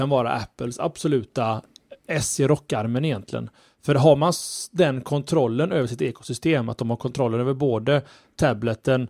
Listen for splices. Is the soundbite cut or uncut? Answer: uncut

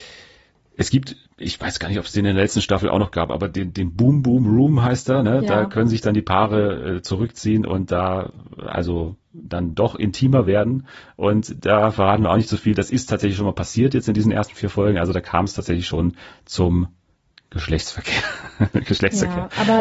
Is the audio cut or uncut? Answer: uncut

